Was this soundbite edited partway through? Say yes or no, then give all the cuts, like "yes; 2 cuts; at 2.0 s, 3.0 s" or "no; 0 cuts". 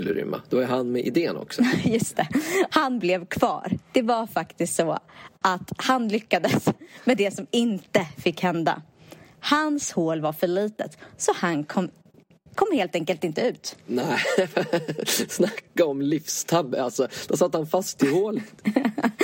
yes; 1 cut; at 2.7 s